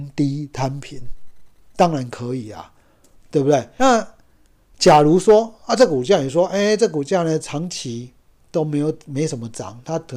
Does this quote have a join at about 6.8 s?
no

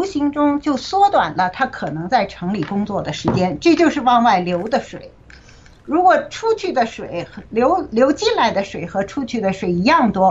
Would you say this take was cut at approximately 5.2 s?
no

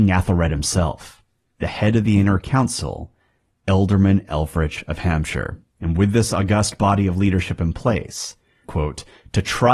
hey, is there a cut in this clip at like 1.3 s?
no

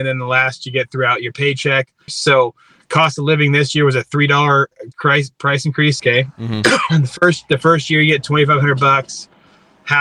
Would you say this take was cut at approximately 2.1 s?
yes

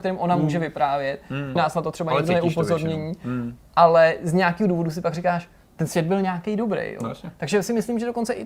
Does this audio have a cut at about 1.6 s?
yes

